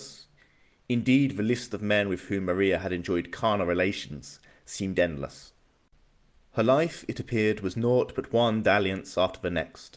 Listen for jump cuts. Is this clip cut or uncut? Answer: uncut